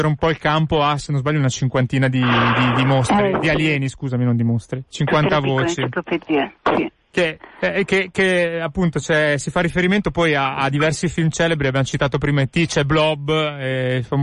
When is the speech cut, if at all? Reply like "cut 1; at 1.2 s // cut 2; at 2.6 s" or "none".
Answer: cut 1; at 4.9 s

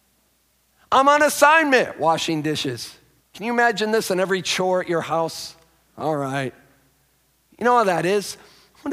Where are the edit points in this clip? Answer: cut 1; at 3.2 s // cut 2; at 5.8 s

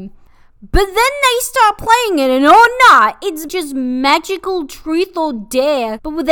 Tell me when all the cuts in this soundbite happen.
cut 1; at 3.5 s

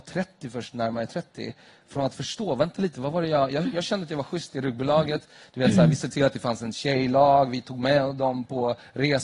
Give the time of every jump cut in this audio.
none

